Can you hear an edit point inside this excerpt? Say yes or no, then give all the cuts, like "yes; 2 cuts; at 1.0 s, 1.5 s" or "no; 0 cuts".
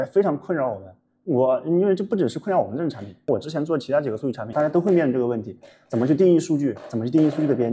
yes; 1 cut; at 4.5 s